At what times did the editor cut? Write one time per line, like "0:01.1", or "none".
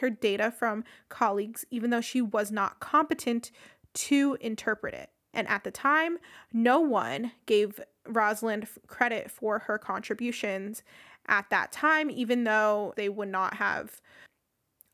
0:05.3
0:12.9